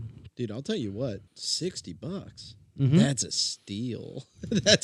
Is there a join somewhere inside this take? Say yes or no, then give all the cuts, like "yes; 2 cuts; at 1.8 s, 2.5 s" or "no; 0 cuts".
yes; 1 cut; at 1.3 s